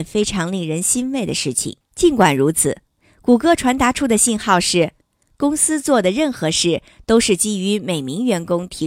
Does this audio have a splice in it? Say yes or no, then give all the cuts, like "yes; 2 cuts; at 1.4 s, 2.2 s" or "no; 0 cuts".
yes; 1 cut; at 1.8 s